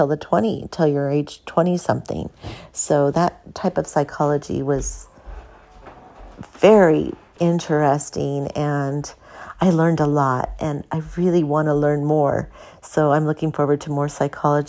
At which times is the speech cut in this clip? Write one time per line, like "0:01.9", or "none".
0:07.4